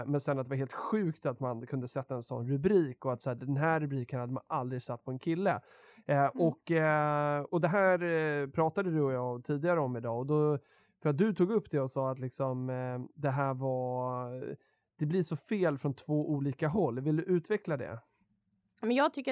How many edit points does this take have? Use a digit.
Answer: 1